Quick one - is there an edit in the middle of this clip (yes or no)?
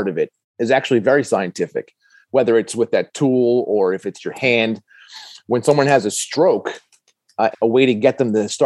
yes